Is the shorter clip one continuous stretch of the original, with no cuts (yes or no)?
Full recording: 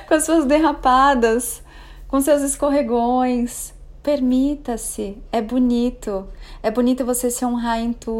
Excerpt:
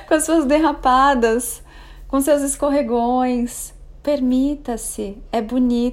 yes